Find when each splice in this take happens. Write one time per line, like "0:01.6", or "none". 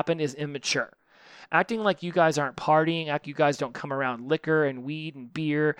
0:03.2